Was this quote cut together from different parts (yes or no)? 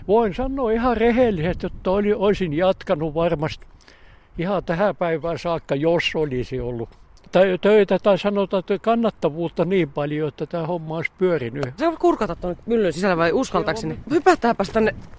yes